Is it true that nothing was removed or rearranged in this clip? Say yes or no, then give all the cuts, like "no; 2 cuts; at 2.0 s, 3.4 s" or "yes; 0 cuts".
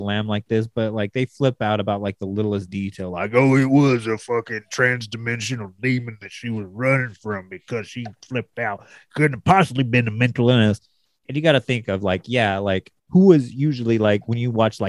yes; 0 cuts